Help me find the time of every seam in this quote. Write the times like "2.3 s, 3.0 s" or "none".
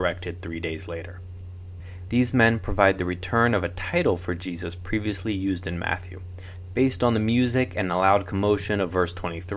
2.1 s, 6.7 s